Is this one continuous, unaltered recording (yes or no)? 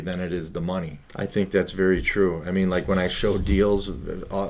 no